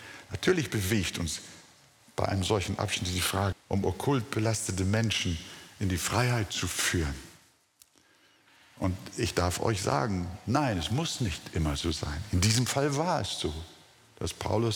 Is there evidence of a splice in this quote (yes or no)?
yes